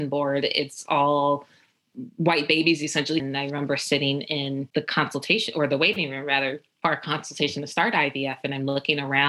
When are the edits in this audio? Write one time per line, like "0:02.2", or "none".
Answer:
0:03.2